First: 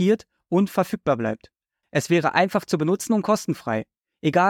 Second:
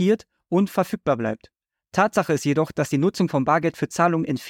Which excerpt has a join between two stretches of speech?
first; 1 cut; at 1.8 s

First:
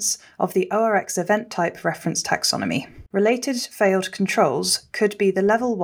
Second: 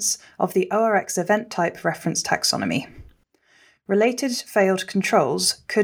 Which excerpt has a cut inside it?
first; 1 cut; at 3.1 s

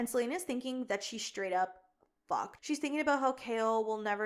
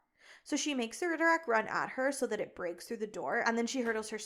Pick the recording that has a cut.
first; 1 cut; at 2.6 s

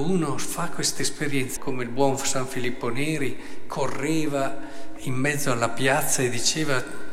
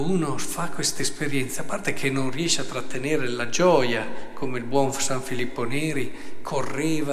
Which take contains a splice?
first; 1 cut; at 1.6 s

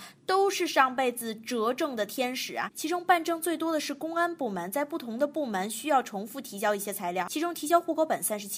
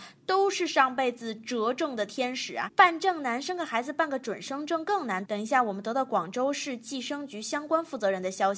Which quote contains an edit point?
first; 1 cut; at 2.7 s

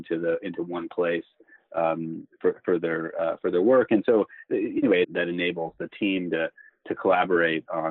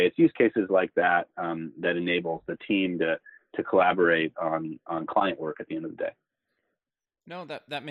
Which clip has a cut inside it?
first; 1 cut; at 5.0 s

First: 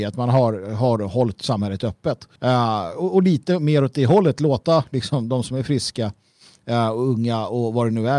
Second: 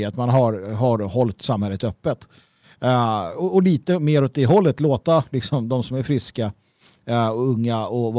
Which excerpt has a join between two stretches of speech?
first; 1 cut; at 2.4 s

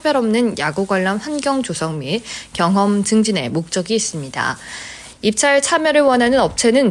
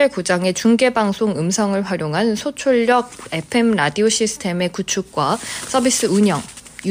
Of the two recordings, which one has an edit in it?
first; 1 cut; at 5.1 s

